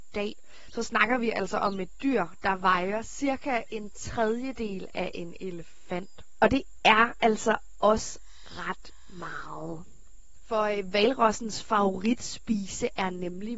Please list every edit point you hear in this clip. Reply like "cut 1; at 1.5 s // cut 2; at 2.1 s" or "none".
cut 1; at 10.4 s